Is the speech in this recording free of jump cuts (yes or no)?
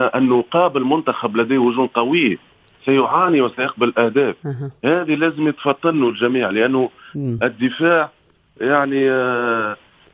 yes